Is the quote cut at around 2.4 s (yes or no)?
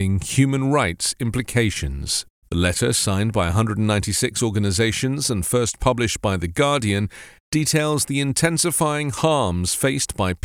yes